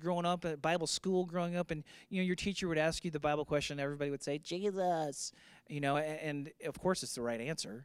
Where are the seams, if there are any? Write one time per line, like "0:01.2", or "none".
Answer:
none